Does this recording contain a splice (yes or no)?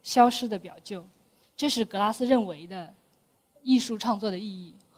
yes